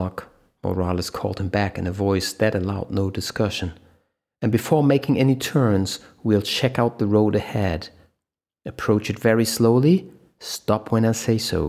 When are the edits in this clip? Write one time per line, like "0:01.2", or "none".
none

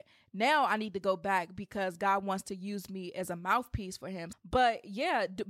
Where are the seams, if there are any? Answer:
0:04.3

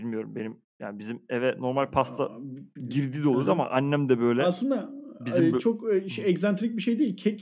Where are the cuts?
none

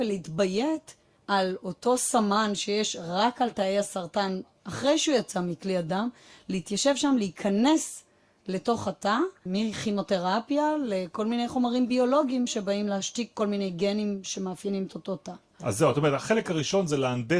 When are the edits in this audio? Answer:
0:09.5

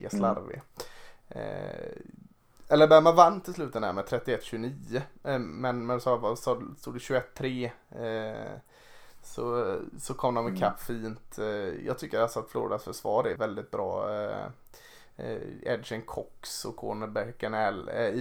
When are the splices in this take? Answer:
0:13.4

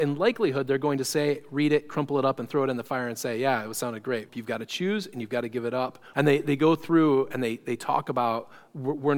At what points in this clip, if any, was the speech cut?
0:04.3
0:06.1

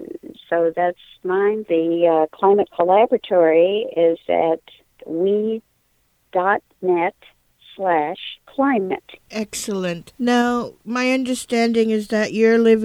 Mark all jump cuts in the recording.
0:08.5

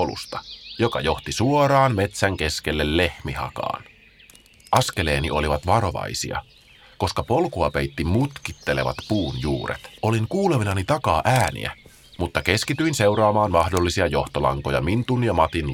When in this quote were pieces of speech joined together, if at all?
0:10.0

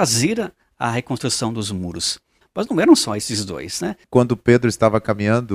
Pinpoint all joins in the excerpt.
0:02.4
0:04.0

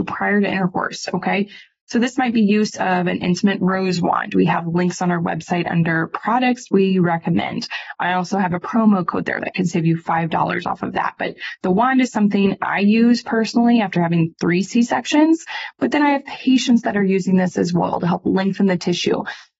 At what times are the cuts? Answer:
none

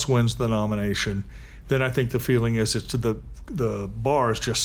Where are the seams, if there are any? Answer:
none

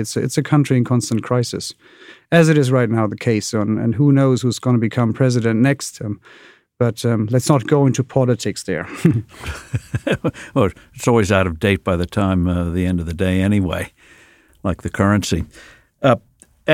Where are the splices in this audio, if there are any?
none

